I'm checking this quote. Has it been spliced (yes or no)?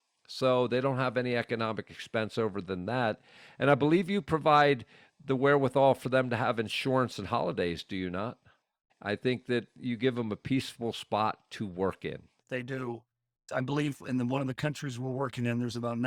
yes